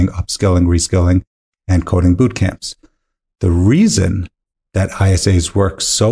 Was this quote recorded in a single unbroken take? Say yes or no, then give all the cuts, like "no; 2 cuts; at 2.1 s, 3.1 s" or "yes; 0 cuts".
yes; 0 cuts